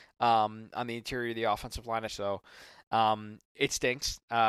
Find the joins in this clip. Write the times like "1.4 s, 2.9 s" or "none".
2.1 s